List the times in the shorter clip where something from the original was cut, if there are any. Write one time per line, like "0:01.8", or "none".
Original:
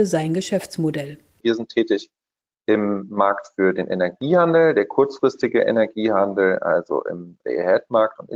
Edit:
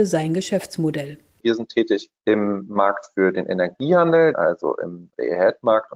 0:02.2
0:04.3

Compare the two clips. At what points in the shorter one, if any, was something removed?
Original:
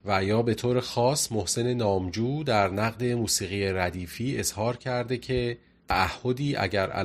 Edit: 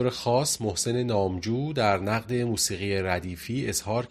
none

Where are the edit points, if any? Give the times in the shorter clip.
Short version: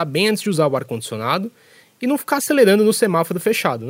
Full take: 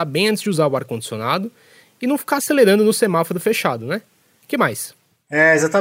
none

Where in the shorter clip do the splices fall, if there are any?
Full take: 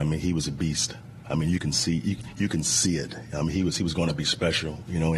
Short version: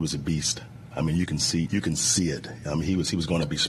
0:01.7

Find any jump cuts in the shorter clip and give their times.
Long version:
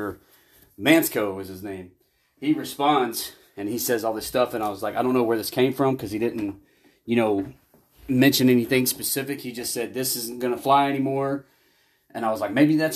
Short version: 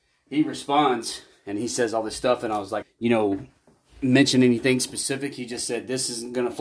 0:02.8

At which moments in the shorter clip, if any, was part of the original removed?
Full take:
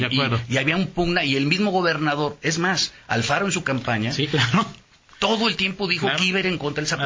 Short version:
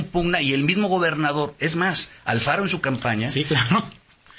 none

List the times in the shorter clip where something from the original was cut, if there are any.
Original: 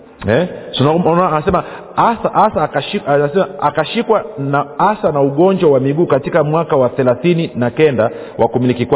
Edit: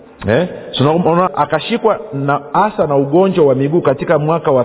0:01.3

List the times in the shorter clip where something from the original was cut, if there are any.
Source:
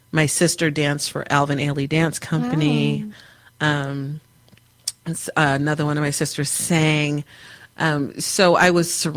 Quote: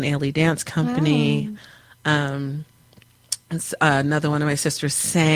none

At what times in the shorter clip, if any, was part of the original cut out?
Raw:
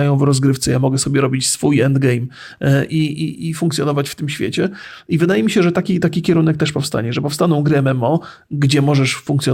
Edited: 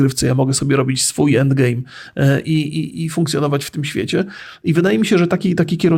none

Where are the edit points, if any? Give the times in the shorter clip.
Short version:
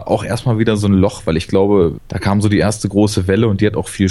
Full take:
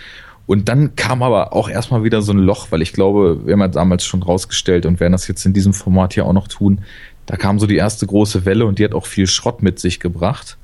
0:02.0

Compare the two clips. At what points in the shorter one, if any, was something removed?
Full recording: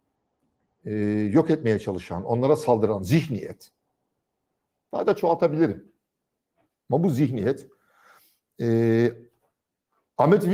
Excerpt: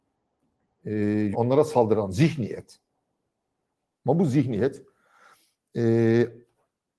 0:01.3
0:03.9

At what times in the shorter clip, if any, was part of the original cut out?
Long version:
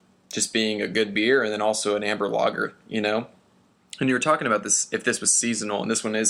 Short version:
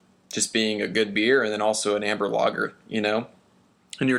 none

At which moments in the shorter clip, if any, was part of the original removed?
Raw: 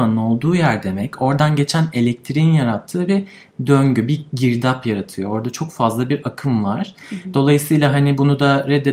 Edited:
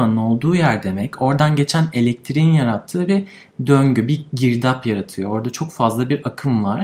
none

